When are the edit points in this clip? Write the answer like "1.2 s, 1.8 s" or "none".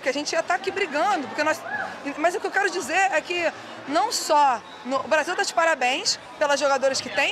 none